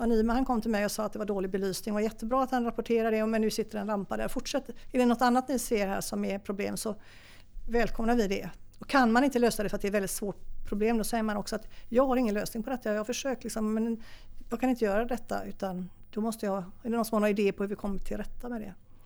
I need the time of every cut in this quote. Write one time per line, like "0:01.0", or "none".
none

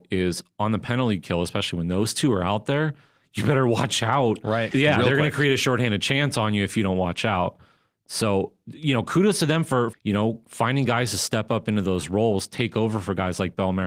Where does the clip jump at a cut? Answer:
0:04.7
0:09.9

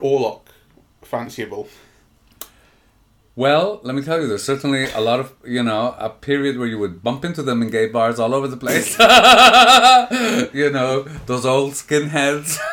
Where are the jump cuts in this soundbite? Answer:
none

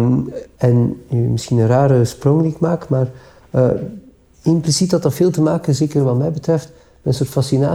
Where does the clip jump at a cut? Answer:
none

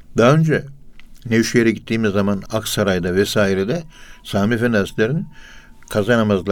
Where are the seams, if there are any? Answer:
0:02.5

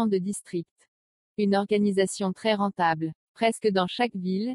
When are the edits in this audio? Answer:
0:01.3
0:03.2

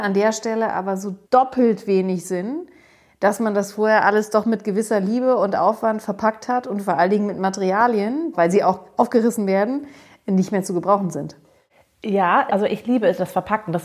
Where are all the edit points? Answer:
0:01.2
0:08.3
0:12.5

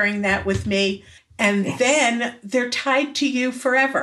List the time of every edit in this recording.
0:01.2

